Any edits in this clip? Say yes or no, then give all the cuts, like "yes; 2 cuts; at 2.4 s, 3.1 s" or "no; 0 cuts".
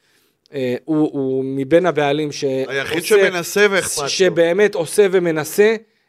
yes; 1 cut; at 1.1 s